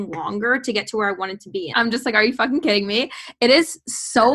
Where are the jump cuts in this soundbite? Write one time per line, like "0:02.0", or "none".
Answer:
0:01.7